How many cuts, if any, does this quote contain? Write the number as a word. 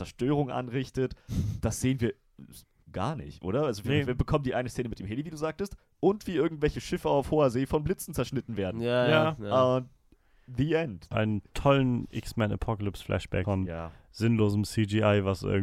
two